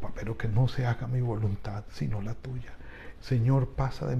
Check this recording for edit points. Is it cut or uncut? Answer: cut